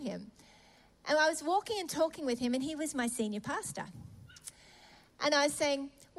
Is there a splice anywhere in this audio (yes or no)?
no